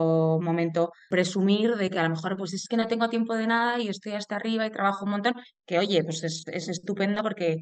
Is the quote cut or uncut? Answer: uncut